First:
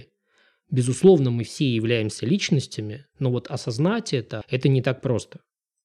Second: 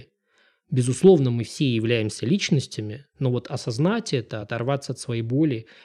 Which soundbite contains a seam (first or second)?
first